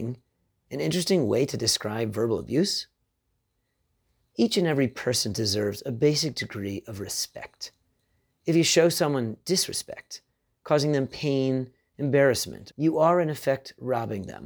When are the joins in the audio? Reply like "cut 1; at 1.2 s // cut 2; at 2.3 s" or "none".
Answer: cut 1; at 12.7 s